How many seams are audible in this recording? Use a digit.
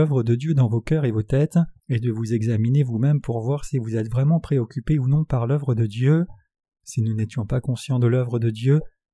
2